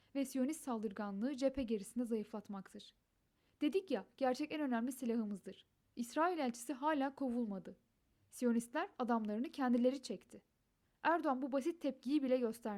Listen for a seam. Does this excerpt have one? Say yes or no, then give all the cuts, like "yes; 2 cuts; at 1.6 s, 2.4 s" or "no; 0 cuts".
yes; 1 cut; at 5.8 s